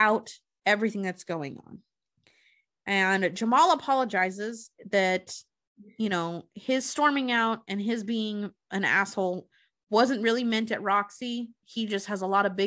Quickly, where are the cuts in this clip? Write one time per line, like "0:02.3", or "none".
0:11.6